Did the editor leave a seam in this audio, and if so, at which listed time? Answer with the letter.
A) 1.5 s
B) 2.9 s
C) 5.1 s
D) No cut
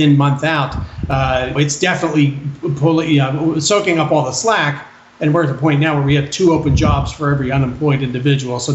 A